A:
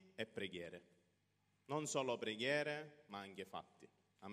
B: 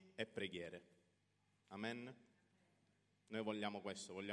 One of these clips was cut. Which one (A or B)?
B